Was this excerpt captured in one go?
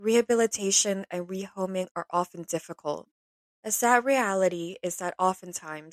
yes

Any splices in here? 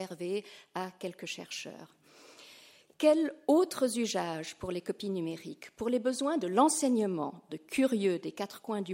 yes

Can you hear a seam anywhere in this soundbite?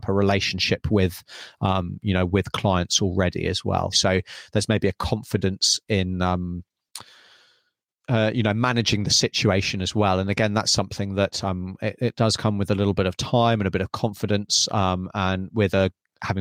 yes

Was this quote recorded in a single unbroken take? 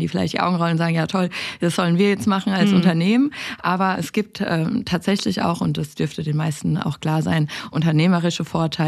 yes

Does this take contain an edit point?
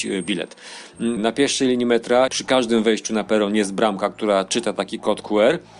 yes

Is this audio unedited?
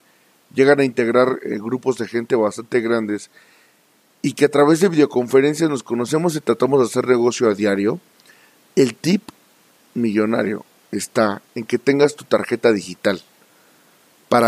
yes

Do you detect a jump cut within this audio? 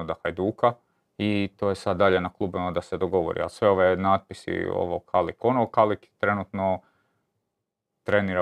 yes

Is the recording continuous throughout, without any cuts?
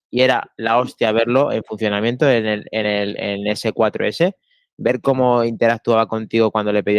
yes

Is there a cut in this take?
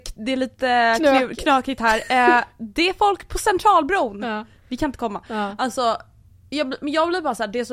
no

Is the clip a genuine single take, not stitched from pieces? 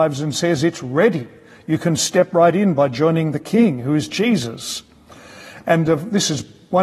yes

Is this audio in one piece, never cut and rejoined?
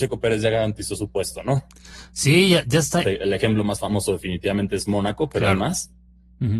no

